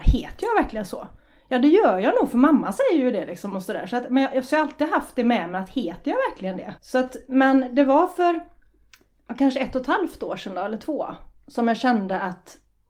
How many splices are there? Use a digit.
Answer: 1